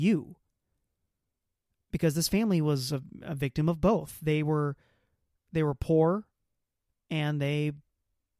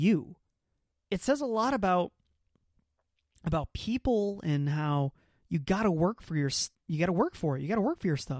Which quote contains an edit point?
second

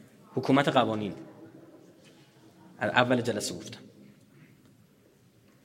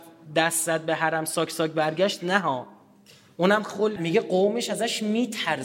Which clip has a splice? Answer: second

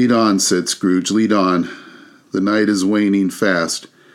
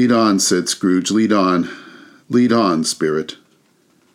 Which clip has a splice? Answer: second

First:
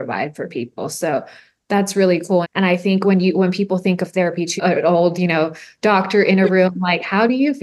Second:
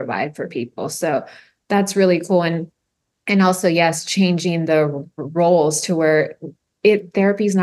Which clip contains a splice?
first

